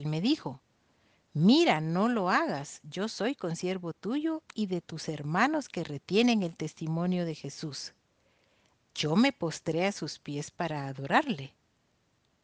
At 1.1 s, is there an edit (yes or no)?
no